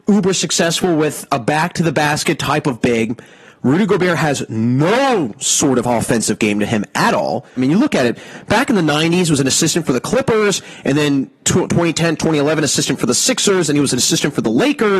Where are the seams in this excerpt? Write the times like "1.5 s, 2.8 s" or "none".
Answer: 7.6 s